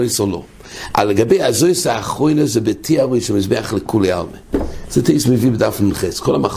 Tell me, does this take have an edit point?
no; 0 cuts

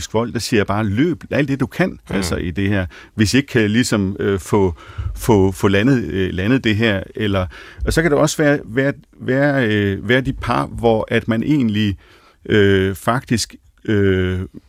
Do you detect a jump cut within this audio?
no; 0 cuts

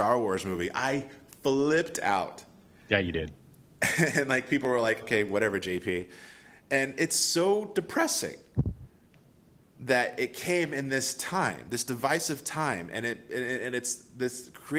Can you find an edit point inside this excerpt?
yes; 1 cut; at 5.0 s

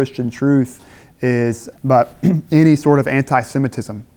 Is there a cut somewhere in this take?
yes; 1 cut; at 1.7 s

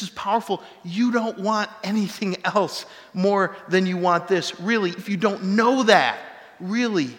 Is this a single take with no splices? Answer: no; 1 cut; at 5.0 s

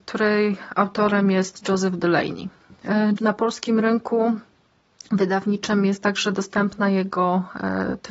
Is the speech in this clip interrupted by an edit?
yes; 1 cut; at 3.2 s

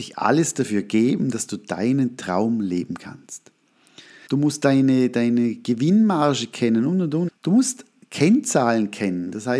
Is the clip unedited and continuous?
no; 2 cuts; at 4.3 s, 7.3 s

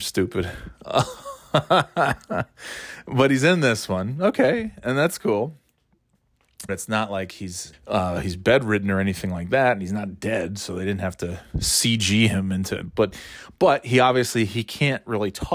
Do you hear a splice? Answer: yes; 2 cuts; at 6.7 s, 7.7 s

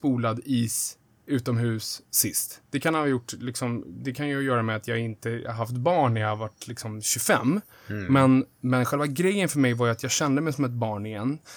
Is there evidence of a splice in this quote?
yes; 1 cut; at 2.6 s

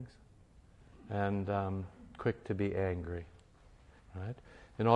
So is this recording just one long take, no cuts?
no; 1 cut; at 4.0 s

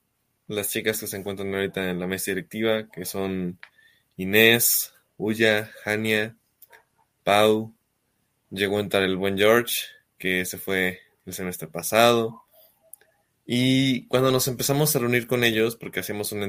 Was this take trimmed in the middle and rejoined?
no; 0 cuts

